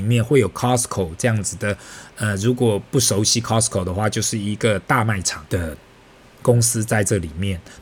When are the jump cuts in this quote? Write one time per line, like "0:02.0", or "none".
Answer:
0:05.5